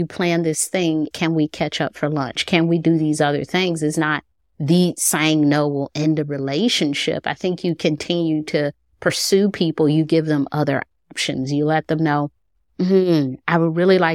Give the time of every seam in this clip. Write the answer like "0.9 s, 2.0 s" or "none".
1.1 s

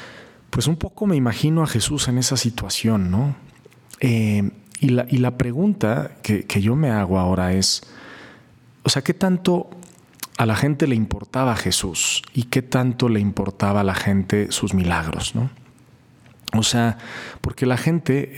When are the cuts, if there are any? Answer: none

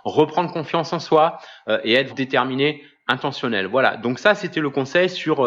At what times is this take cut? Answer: 2.1 s

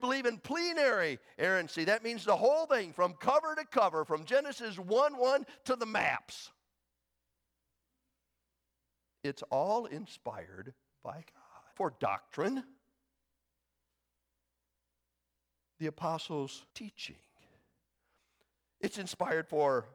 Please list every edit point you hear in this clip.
11.7 s, 16.7 s

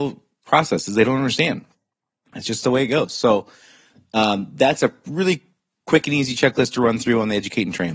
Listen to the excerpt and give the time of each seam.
none

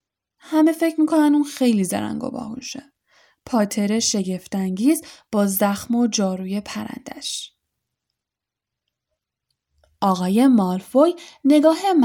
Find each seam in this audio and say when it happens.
none

